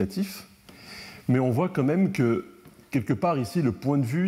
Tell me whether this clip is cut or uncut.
uncut